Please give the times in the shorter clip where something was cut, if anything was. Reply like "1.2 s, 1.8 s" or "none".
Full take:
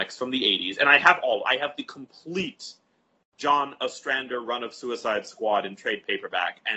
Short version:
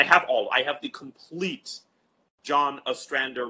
none